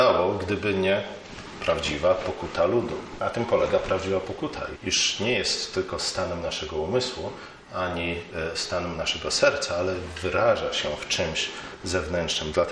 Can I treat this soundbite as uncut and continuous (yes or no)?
no